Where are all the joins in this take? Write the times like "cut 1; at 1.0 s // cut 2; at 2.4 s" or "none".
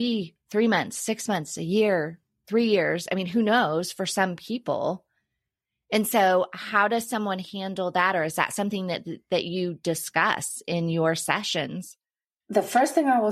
none